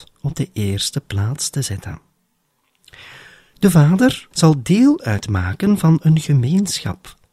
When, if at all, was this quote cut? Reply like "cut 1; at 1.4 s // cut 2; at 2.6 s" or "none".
cut 1; at 4.3 s